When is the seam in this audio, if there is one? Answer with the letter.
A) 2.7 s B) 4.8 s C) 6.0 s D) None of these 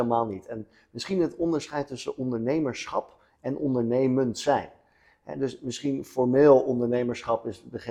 D